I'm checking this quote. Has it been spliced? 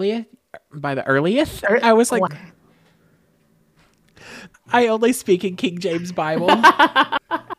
yes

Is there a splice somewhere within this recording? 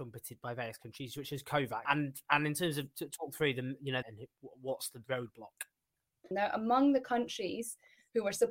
yes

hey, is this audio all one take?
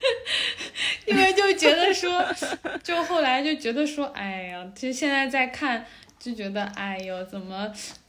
yes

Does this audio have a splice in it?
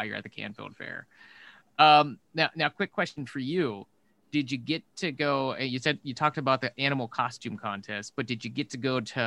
no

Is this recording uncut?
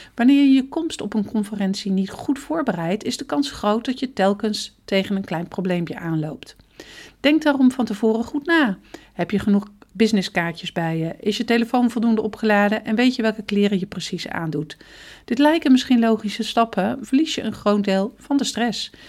no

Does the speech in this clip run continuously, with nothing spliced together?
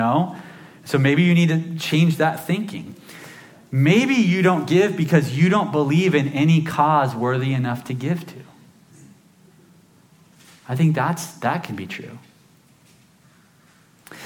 yes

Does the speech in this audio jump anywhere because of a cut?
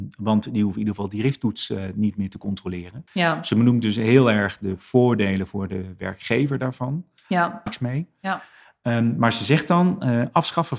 yes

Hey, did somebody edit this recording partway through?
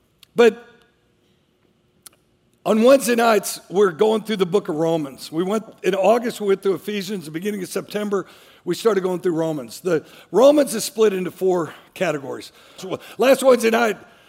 yes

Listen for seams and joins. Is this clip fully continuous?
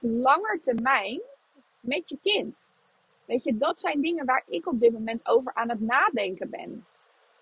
yes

